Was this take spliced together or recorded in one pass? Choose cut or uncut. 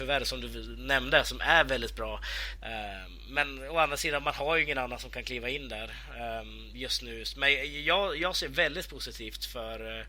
cut